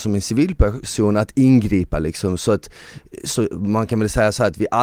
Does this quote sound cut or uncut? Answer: uncut